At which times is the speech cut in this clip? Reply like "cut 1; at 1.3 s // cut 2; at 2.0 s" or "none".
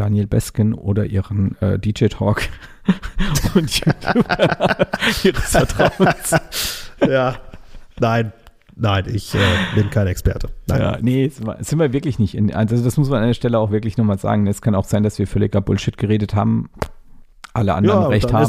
none